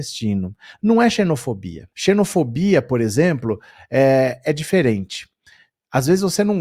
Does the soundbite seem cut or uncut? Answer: cut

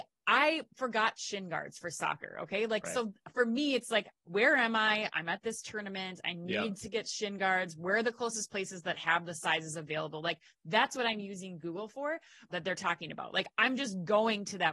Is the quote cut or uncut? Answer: cut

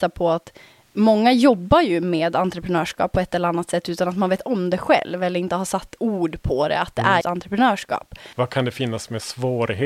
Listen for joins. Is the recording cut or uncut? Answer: cut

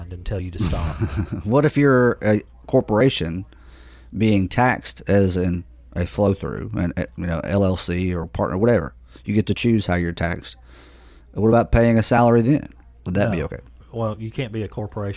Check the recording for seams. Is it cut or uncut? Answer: uncut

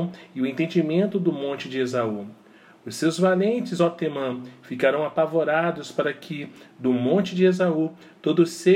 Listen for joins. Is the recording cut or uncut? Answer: uncut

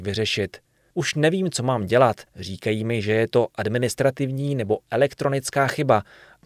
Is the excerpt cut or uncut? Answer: cut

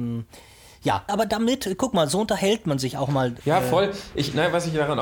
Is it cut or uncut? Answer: cut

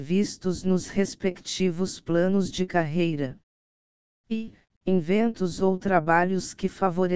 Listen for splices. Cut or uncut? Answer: cut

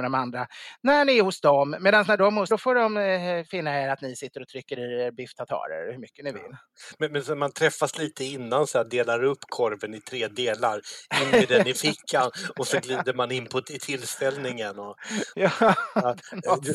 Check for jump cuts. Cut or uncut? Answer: cut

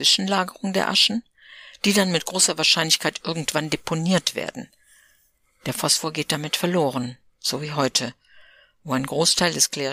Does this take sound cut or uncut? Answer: uncut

